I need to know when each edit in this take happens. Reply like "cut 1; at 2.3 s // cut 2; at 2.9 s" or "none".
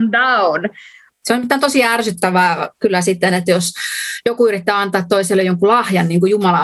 cut 1; at 1.1 s

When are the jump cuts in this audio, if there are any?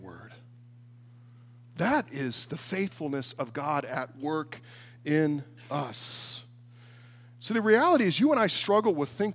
none

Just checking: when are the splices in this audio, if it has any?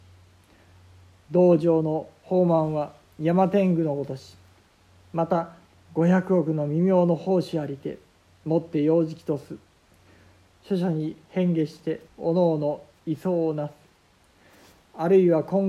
cut 1; at 10.5 s // cut 2; at 12.1 s

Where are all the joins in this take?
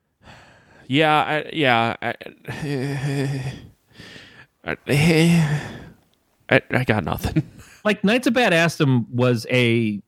none

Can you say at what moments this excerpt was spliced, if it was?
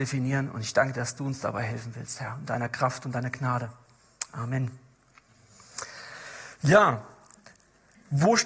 none

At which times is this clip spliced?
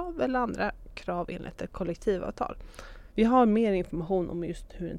cut 1; at 3.1 s

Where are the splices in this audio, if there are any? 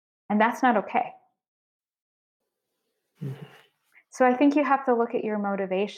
cut 1; at 3.1 s

